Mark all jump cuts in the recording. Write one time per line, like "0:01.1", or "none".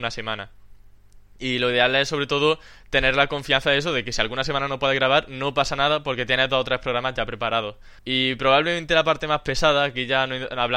0:08.0